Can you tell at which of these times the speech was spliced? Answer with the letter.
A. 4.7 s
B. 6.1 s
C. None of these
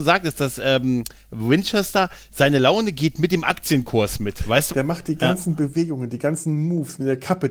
A